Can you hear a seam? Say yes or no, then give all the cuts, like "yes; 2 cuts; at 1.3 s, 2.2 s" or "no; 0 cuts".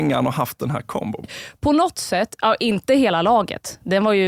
yes; 1 cut; at 1.2 s